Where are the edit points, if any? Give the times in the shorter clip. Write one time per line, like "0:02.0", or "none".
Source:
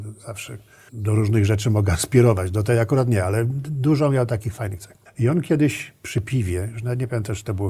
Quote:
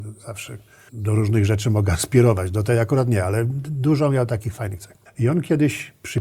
none